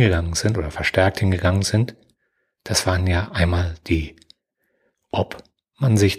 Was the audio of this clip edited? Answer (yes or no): no